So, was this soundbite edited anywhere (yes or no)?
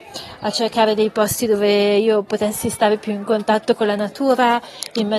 no